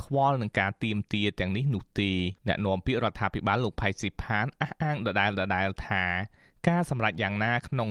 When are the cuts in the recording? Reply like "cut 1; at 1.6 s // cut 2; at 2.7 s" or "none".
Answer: cut 1; at 2.4 s